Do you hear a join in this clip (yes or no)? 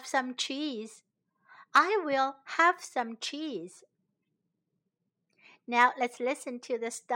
no